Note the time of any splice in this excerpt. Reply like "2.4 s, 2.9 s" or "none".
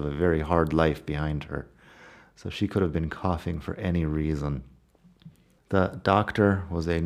5.6 s